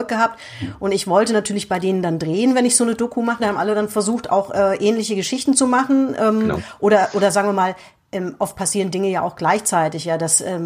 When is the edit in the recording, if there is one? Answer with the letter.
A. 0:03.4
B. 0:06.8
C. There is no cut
A